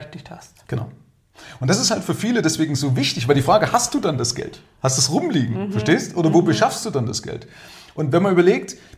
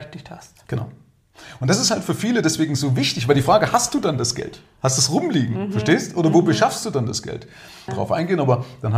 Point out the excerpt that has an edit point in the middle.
second; 1 cut; at 7.9 s

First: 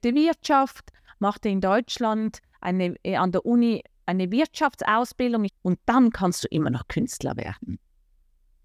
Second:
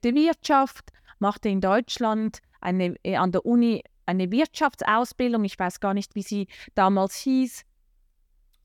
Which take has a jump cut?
first; 1 cut; at 5.5 s

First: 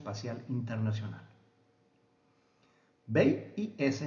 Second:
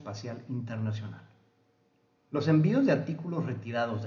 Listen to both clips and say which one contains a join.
second; 1 cut; at 2.3 s

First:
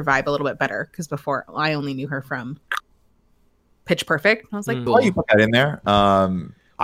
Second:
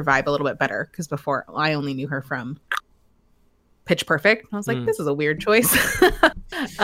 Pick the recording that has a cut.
first; 1 cut; at 4.9 s

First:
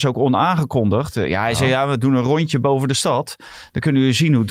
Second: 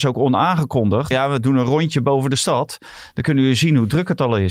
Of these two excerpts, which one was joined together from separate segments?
second; 1 cut; at 1.1 s

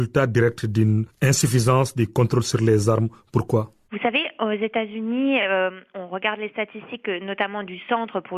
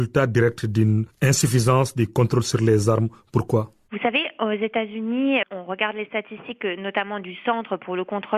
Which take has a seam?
second; 1 cut; at 5.4 s

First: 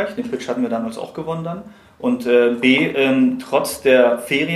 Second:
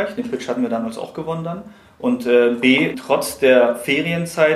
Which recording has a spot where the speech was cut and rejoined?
second; 1 cut; at 2.9 s

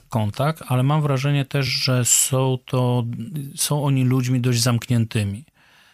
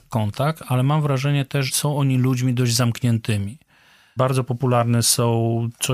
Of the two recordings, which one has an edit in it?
second; 2 cuts; at 1.7 s, 4.2 s

